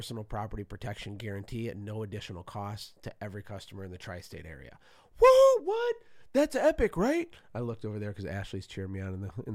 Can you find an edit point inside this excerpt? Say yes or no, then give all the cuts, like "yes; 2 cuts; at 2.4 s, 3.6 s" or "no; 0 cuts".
no; 0 cuts